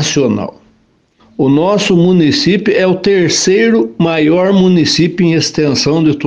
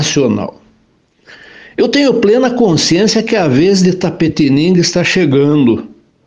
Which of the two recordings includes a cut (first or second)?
first